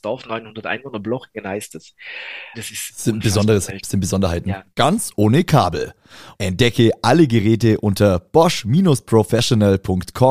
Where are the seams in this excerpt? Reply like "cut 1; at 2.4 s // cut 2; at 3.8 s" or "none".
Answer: cut 1; at 2.5 s // cut 2; at 4.7 s // cut 3; at 6.3 s